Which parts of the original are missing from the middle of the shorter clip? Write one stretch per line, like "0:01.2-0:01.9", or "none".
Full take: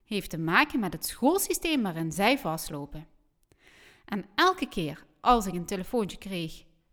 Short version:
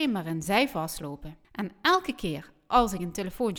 0:03.1-0:04.0